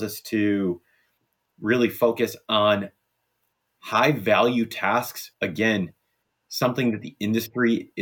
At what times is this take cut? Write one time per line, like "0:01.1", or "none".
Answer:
0:05.3